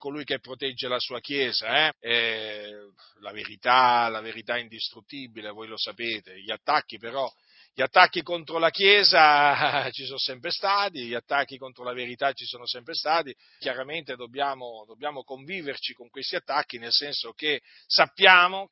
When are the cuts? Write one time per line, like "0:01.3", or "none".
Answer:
0:01.9
0:13.6